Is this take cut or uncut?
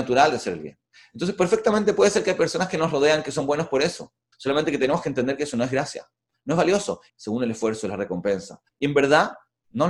cut